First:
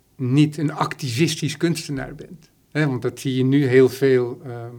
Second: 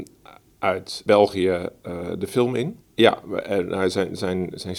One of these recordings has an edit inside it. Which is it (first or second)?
second